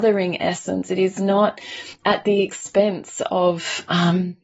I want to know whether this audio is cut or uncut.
uncut